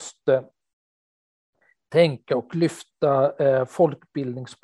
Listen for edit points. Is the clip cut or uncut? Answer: uncut